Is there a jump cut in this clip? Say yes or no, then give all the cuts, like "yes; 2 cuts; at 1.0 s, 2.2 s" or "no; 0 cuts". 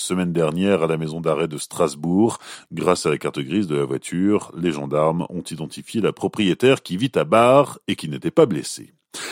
yes; 1 cut; at 2.6 s